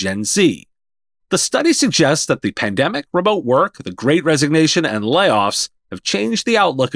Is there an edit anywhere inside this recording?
no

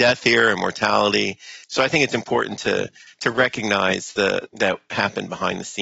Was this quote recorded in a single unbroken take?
no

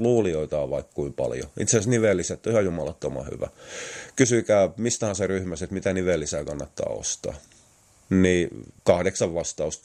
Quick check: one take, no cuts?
no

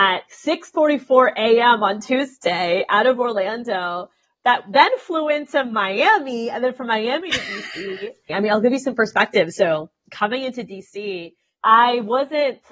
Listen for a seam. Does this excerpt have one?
yes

